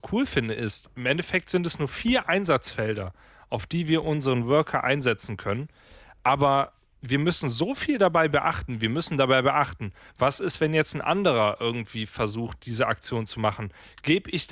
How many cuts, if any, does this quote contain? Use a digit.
0